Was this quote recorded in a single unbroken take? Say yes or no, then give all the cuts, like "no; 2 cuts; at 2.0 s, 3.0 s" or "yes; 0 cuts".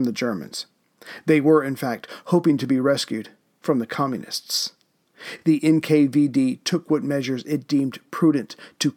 yes; 0 cuts